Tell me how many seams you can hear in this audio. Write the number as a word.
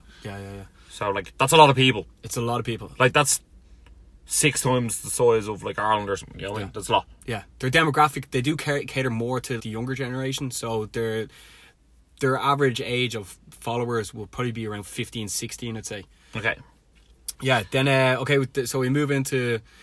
one